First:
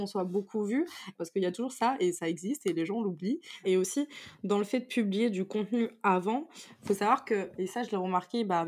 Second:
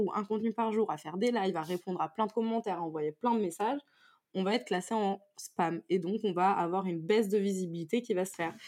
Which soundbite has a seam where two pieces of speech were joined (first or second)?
first